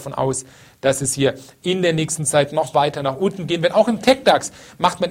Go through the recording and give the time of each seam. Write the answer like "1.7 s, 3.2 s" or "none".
none